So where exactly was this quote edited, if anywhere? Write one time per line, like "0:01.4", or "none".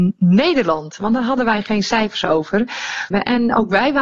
0:03.1